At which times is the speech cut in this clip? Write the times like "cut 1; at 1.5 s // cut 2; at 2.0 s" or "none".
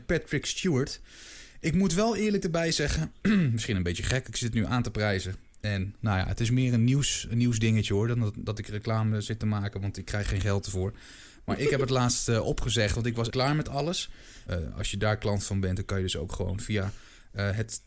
cut 1; at 13.3 s // cut 2; at 14.5 s